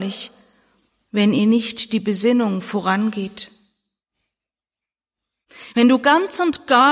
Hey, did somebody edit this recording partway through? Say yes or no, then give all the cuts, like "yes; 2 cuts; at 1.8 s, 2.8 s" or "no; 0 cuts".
no; 0 cuts